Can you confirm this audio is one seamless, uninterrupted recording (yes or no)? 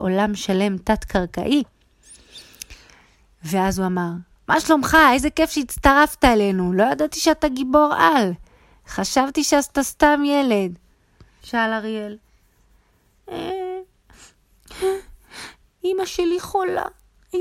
no